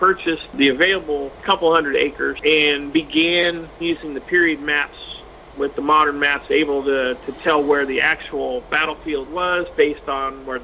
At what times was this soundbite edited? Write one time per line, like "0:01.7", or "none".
0:03.8

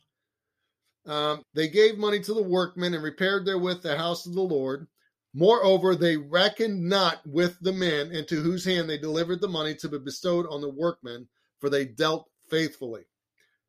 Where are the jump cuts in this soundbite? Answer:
0:01.4
0:05.3

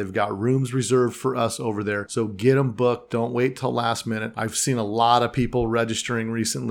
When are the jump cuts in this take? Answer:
none

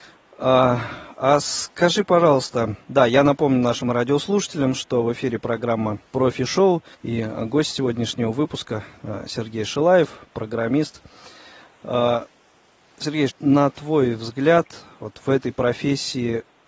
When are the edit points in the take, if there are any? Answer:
0:06.9
0:13.3

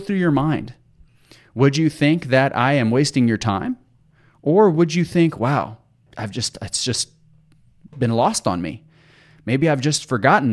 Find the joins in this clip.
0:06.1

